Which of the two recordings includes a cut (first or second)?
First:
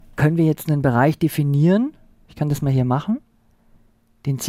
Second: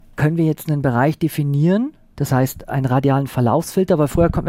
second